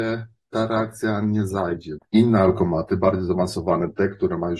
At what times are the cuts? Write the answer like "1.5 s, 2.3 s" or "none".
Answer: 2.0 s